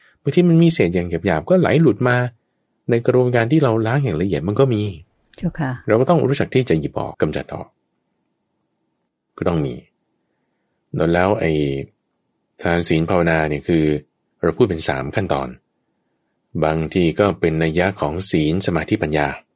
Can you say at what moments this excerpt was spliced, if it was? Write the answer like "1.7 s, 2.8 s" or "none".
7.1 s